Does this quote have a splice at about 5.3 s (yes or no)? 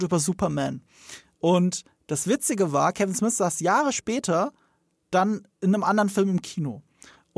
no